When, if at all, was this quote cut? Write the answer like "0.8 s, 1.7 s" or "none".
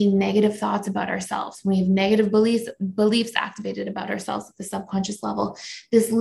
none